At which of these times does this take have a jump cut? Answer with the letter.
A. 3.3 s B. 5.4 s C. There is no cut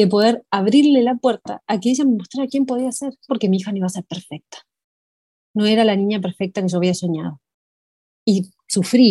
A